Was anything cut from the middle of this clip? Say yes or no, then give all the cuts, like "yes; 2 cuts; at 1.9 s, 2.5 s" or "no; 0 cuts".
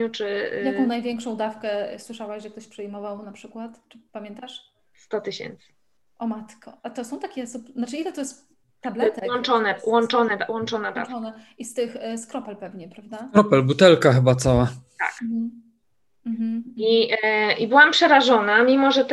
no; 0 cuts